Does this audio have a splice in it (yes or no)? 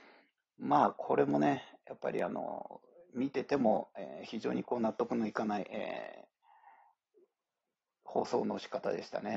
no